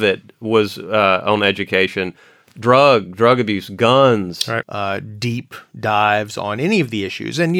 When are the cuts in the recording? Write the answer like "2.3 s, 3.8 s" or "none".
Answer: 4.6 s